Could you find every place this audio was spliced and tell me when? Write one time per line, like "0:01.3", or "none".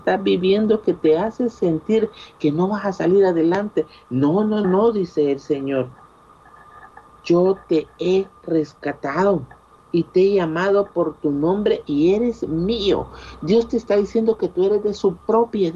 0:04.6